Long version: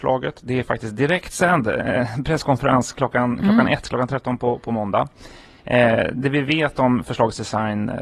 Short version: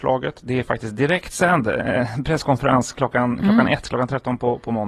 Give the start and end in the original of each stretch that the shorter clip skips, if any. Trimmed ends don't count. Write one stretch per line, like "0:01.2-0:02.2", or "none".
none